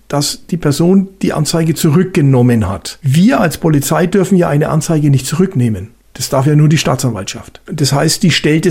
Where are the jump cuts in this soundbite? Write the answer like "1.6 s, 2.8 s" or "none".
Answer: none